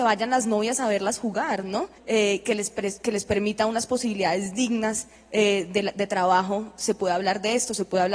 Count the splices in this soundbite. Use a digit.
1